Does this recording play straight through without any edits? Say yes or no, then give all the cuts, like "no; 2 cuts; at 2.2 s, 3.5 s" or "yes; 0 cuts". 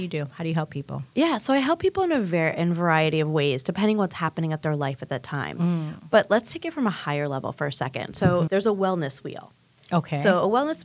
yes; 0 cuts